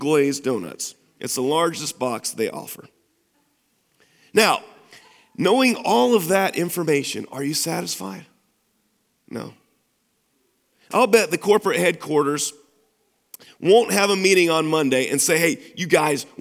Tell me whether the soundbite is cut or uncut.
uncut